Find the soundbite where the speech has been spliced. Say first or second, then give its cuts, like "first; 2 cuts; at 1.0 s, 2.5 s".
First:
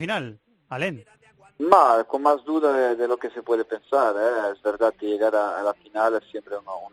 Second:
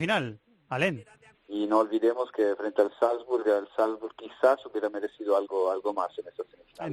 second; 1 cut; at 1.3 s